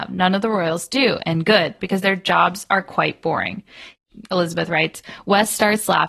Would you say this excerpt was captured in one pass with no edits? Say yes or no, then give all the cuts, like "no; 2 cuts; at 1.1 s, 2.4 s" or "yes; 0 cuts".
no; 1 cut; at 1.8 s